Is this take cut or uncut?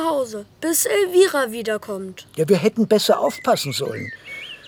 uncut